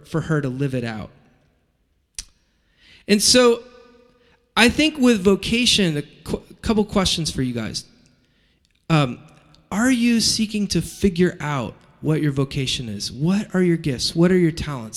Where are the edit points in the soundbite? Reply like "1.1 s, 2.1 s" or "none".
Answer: none